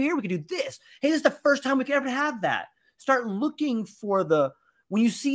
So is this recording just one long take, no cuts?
yes; 0 cuts

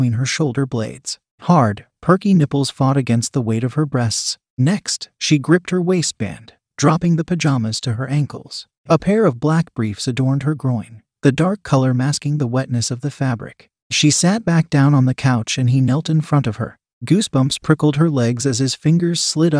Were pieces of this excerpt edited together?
no; 0 cuts

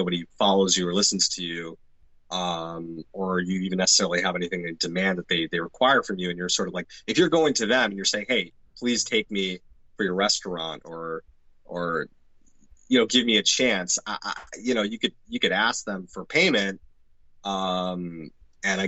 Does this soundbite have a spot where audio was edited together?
no; 0 cuts

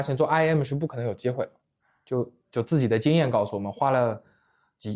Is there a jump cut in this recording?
no; 0 cuts

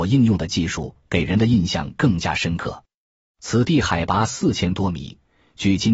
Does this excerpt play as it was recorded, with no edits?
yes; 0 cuts

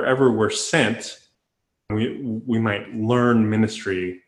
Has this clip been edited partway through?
yes; 1 cut; at 1.9 s

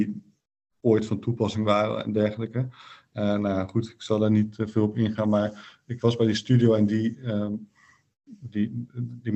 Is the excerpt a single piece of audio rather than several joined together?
yes; 0 cuts

